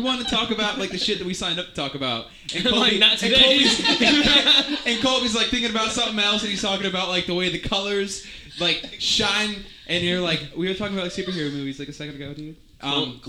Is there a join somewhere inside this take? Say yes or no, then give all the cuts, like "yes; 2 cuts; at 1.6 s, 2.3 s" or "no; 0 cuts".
no; 0 cuts